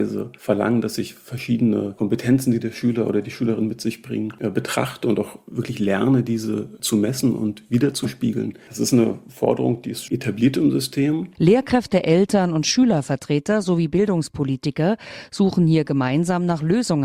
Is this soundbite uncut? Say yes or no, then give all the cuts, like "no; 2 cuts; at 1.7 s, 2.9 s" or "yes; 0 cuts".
no; 2 cuts; at 10.1 s, 11.3 s